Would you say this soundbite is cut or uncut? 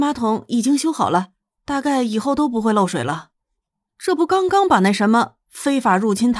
cut